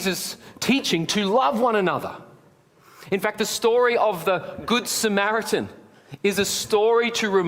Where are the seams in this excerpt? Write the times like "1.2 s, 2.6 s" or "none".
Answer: none